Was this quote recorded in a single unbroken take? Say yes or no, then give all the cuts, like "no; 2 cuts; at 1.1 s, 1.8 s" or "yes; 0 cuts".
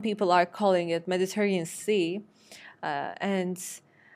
yes; 0 cuts